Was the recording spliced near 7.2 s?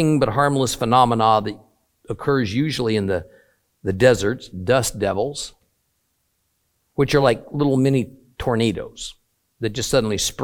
no; 0 cuts

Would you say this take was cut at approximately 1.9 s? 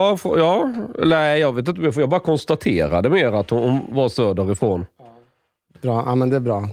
no; 1 cut; at 5.8 s

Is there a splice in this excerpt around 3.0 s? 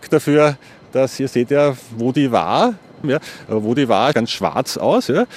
yes; 2 cuts; at 3.0 s, 4.1 s

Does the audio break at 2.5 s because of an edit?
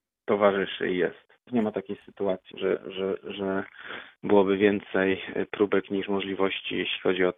yes; 2 cuts; at 1.5 s, 2.5 s

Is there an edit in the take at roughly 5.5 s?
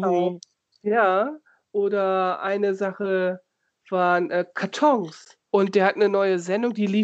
yes; 1 cut; at 5.5 s

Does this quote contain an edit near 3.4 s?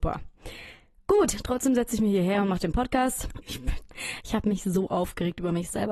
yes; 1 cut; at 3.4 s

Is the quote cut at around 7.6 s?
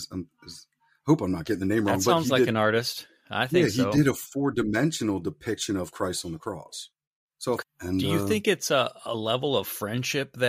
yes; 1 cut; at 7.6 s

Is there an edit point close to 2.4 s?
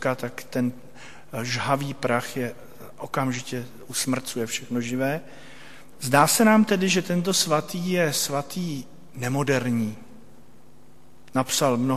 no; 1 cut; at 5.9 s

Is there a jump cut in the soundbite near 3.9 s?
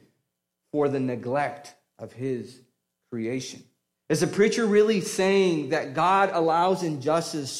yes; 1 cut; at 3.9 s

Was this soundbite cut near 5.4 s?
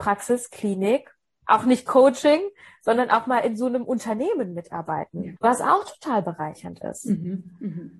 yes; 1 cut; at 5.4 s

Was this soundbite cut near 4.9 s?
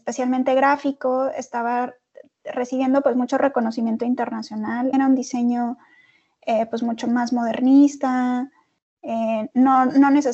yes; 1 cut; at 4.9 s

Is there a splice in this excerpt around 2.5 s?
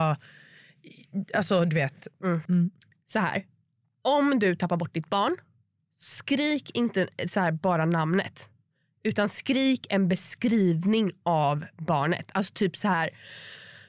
yes; 1 cut; at 2.5 s

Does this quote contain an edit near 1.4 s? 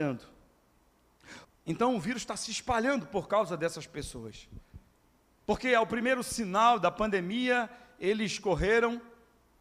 yes; 2 cuts; at 1.4 s, 5.4 s

